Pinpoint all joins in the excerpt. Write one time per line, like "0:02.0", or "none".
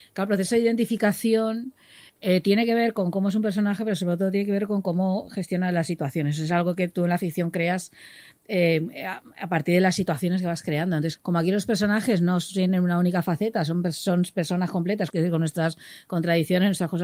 0:11.2
0:15.1